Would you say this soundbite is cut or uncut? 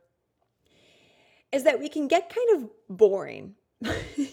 uncut